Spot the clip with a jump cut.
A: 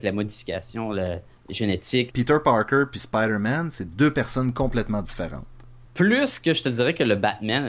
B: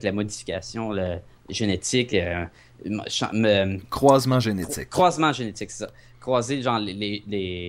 A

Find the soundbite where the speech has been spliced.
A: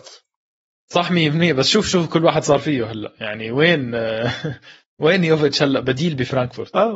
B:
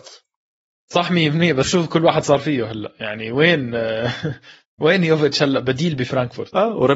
B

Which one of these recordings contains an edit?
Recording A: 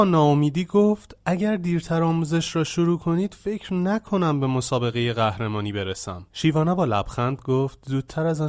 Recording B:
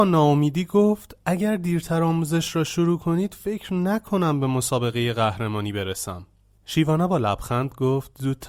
A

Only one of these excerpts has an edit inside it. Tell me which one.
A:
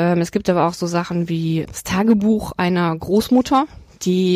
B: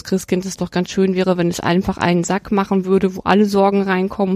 A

